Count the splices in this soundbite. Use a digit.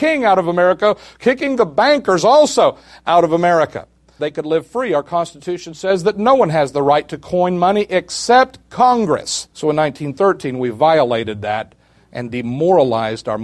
2